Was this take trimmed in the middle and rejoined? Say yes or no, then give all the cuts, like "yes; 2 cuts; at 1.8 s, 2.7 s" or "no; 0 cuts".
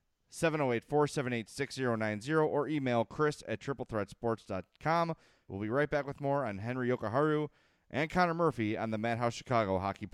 yes; 1 cut; at 5.5 s